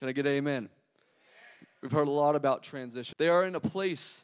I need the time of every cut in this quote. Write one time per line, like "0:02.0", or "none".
0:03.1